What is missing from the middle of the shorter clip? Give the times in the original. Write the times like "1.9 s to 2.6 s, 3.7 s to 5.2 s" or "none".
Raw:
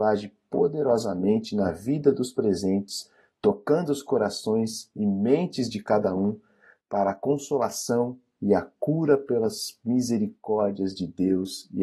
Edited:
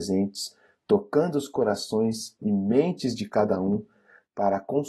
none